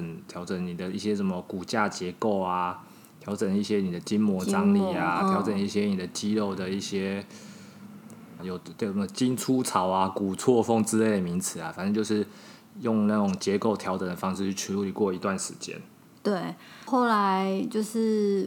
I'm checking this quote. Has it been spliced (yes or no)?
yes